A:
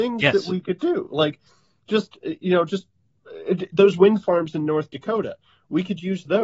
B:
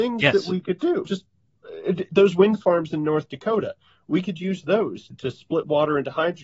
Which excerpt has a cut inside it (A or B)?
B